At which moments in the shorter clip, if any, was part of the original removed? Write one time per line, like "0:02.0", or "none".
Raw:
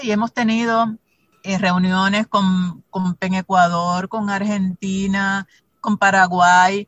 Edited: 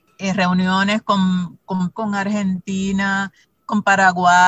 0:01.9